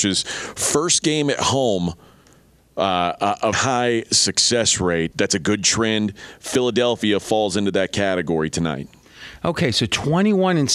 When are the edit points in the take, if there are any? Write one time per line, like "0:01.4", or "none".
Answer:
0:03.5
0:05.1